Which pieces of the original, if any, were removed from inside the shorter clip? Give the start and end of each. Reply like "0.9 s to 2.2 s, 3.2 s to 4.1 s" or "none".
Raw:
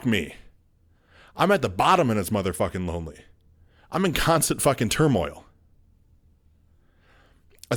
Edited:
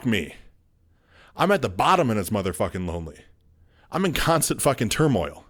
none